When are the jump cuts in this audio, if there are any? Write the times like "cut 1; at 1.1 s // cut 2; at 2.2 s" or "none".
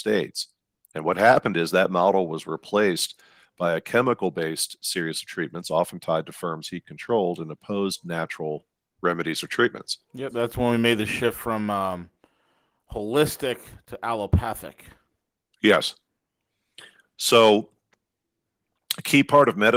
none